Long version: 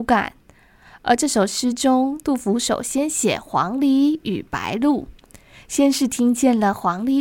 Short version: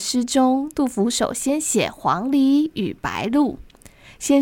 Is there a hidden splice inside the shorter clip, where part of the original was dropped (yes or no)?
no